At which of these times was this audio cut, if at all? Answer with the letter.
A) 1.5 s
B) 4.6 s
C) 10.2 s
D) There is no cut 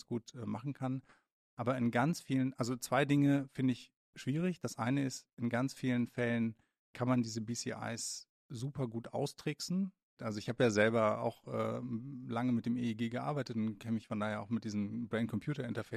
C